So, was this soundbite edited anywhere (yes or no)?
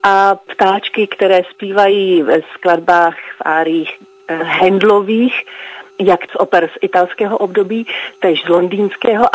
no